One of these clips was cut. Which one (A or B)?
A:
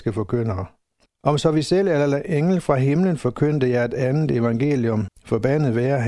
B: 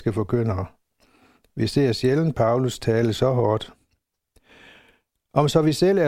A